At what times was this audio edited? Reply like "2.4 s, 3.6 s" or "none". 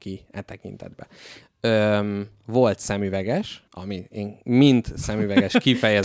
1.4 s, 3.7 s